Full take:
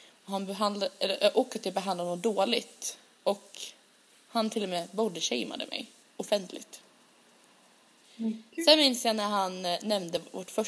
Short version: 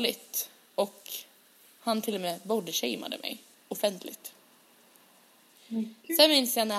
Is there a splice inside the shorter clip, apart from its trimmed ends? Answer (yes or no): no